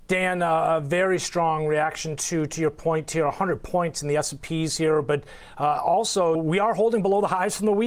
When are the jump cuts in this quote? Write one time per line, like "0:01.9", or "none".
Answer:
0:06.4